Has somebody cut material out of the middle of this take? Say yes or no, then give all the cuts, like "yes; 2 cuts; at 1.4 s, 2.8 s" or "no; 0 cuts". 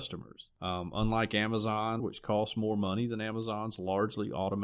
yes; 1 cut; at 2.0 s